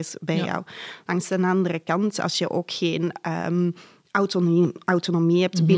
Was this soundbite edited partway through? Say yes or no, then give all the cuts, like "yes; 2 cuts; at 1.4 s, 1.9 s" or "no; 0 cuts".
no; 0 cuts